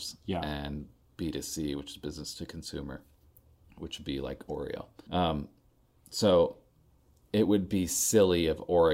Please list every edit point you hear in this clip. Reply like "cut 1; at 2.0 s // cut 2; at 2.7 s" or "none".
cut 1; at 5.1 s